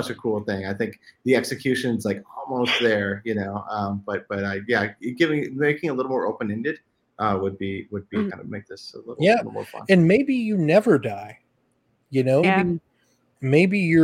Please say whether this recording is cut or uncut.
cut